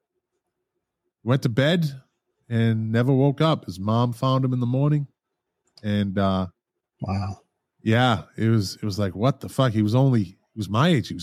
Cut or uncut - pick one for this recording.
uncut